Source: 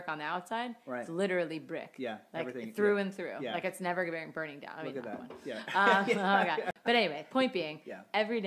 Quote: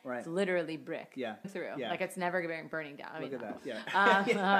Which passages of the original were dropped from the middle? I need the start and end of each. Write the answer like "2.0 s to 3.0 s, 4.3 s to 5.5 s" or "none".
2.3 s to 3.1 s, 5.2 s to 5.4 s